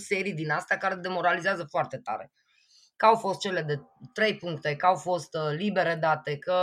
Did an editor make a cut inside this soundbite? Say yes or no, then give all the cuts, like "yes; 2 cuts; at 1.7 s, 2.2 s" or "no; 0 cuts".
no; 0 cuts